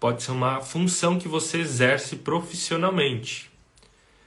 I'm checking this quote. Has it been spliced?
no; 0 cuts

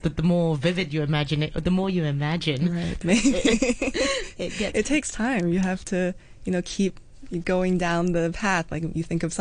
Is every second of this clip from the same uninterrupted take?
no; 1 cut; at 3.0 s

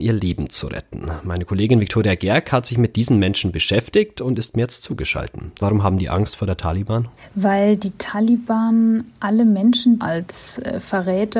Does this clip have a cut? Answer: yes; 2 cuts; at 5.6 s, 10.0 s

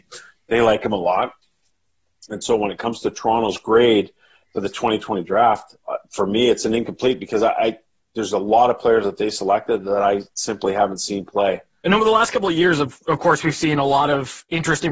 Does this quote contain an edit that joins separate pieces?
yes; 1 cut; at 11.8 s

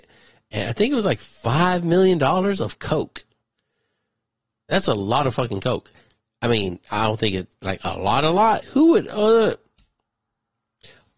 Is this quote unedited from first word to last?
no; 1 cut; at 8.6 s

